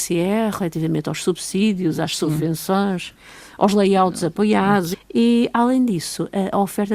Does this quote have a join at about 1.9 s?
no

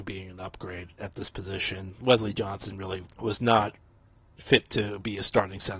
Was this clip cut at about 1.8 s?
no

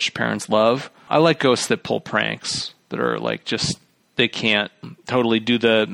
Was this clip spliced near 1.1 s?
yes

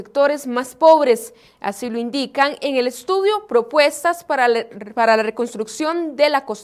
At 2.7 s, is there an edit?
no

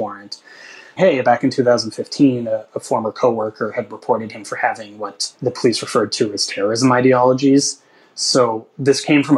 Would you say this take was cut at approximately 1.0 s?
yes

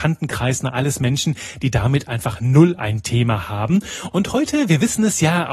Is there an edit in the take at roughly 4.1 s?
yes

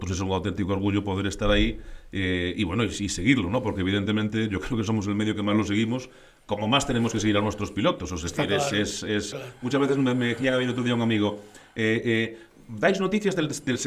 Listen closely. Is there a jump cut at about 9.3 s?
yes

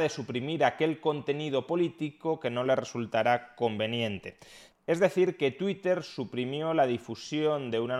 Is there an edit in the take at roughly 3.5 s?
no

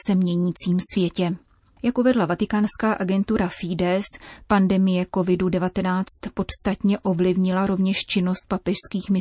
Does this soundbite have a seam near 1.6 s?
no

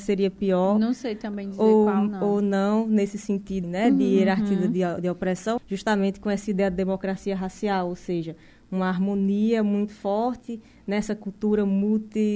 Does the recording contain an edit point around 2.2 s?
no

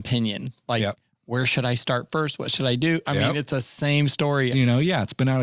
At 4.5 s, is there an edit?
yes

